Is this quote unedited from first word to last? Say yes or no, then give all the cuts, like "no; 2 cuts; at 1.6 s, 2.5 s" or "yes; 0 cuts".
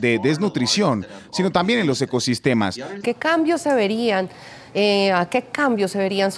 no; 1 cut; at 3.0 s